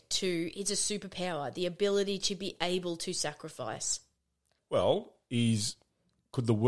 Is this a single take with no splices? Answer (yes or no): no